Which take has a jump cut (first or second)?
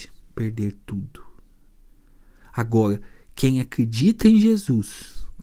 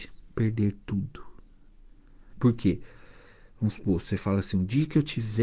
second